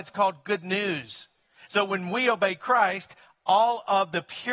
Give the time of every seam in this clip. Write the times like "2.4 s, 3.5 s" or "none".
1.7 s